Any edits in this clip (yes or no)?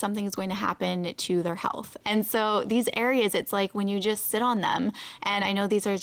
yes